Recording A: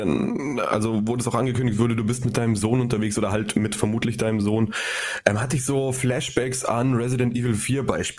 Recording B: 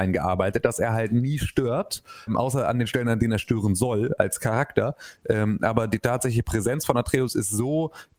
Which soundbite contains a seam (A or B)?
B